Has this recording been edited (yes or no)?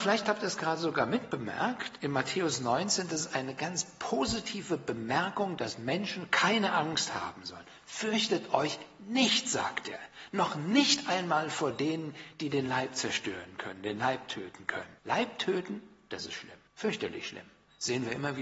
yes